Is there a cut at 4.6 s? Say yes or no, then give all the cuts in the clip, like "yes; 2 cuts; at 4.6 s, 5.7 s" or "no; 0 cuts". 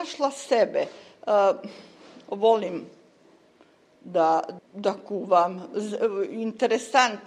yes; 1 cut; at 4.6 s